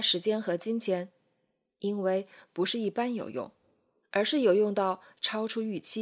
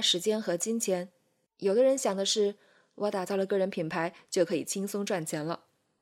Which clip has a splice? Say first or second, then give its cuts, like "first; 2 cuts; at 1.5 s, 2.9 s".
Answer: second; 1 cut; at 1.5 s